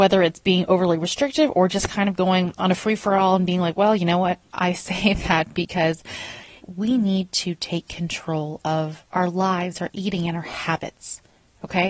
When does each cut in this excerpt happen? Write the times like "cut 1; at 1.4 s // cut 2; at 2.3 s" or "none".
cut 1; at 4.5 s // cut 2; at 6.6 s